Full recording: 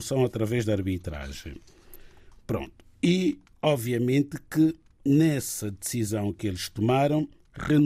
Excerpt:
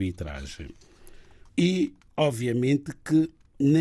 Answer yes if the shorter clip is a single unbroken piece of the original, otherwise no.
no